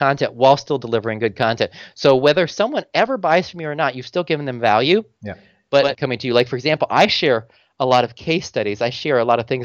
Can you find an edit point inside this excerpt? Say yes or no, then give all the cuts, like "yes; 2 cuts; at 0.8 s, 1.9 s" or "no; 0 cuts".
yes; 1 cut; at 5.9 s